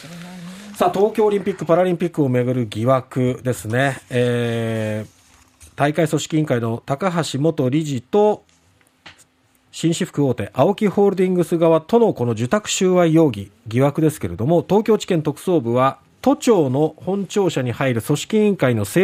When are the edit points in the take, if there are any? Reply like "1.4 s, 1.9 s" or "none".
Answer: none